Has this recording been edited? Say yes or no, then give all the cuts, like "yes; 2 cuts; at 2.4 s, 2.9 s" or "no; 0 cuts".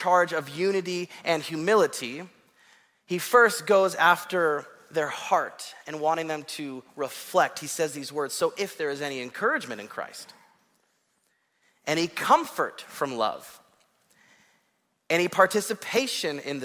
no; 0 cuts